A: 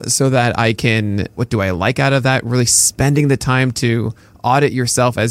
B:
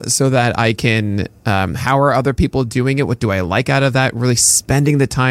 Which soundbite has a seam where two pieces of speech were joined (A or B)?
A